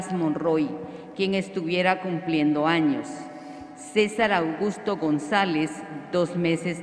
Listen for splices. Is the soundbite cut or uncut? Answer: uncut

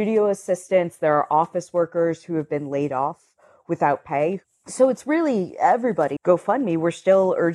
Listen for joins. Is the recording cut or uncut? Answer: cut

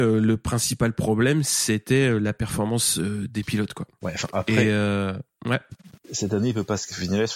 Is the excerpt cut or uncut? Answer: uncut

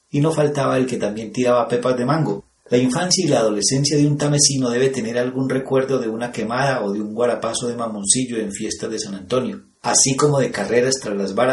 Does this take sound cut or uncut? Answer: cut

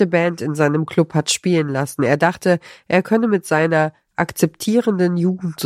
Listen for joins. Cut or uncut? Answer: uncut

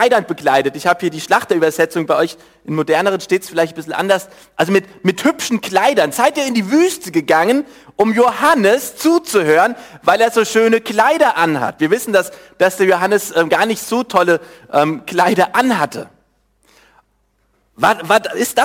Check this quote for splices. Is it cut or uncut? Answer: uncut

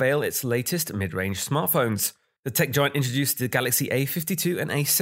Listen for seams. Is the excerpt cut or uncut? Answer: uncut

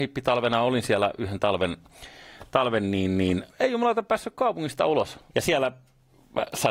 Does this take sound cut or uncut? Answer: cut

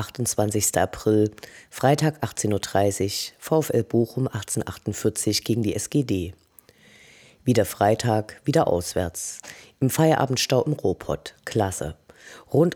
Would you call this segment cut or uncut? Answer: uncut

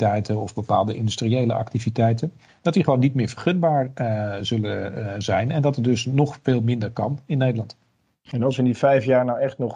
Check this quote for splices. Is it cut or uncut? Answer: uncut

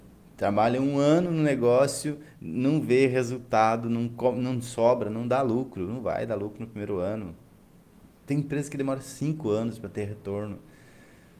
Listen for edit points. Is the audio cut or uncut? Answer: uncut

